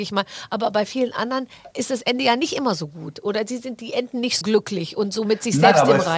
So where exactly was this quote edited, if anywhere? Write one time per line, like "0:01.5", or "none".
0:01.7
0:04.4